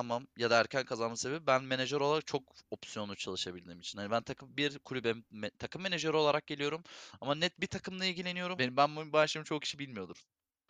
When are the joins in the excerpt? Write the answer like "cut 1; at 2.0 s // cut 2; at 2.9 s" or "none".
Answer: cut 1; at 8.6 s